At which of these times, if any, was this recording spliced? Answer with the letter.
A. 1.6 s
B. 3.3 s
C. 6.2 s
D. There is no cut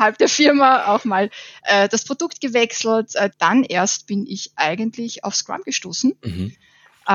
B